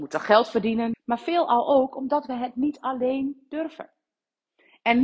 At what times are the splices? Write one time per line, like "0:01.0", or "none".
0:00.9